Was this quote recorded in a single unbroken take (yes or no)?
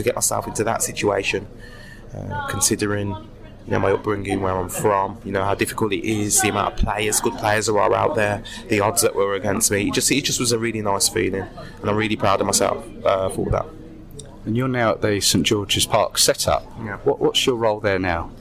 yes